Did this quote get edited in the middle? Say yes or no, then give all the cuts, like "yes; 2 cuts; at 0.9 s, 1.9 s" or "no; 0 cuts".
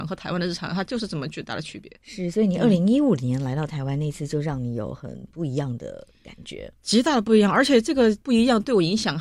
no; 0 cuts